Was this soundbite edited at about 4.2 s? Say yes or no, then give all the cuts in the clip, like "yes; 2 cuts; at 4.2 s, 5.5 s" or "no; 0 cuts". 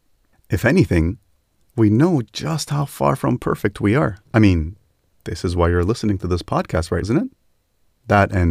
yes; 2 cuts; at 4.2 s, 7.0 s